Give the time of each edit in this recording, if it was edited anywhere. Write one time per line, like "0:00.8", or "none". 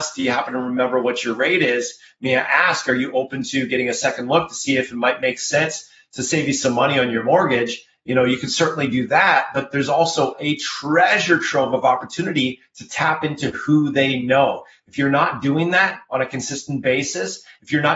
none